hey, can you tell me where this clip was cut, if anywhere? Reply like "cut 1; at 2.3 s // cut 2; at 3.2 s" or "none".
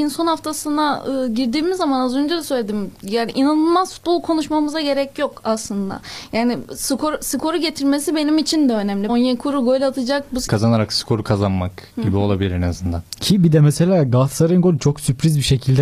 cut 1; at 9.1 s // cut 2; at 10.5 s